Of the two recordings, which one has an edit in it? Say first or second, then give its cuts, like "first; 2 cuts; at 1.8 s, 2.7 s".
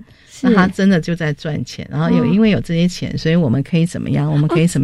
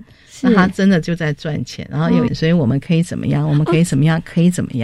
second; 1 cut; at 2.3 s